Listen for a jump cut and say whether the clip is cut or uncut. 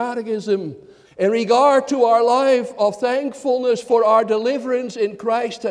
cut